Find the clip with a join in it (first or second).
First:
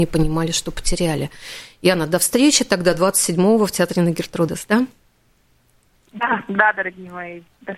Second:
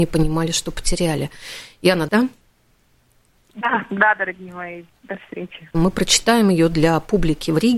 second